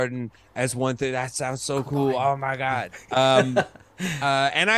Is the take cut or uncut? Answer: uncut